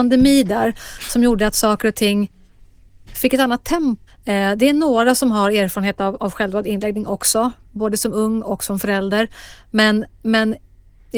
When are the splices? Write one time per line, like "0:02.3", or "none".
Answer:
0:04.1